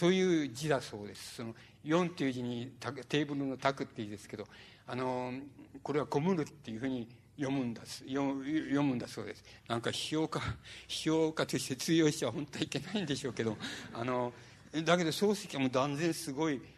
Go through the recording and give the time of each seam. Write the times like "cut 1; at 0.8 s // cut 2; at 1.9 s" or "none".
cut 1; at 9.6 s